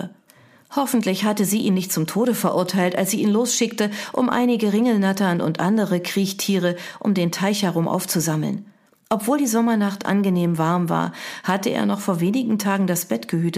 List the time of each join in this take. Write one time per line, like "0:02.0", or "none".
none